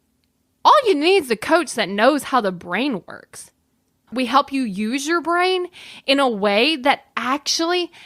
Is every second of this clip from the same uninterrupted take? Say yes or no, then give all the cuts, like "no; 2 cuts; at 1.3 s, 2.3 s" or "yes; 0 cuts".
no; 1 cut; at 4.1 s